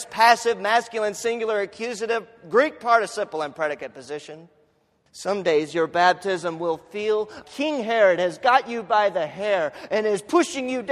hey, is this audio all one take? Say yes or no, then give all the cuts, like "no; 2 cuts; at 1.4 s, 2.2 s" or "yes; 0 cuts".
no; 2 cuts; at 5.1 s, 7.4 s